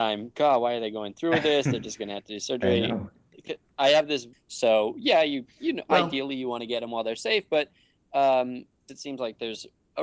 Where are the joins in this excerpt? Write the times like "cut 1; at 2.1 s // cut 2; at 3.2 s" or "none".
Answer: cut 1; at 4.3 s // cut 2; at 8.9 s